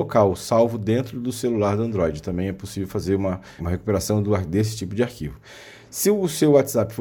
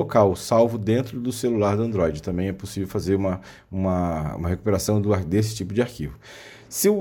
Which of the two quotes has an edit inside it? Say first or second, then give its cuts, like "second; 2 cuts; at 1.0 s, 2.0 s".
first; 1 cut; at 3.6 s